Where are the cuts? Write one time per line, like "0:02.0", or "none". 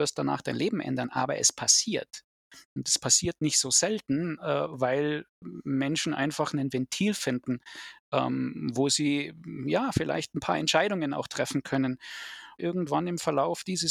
0:12.6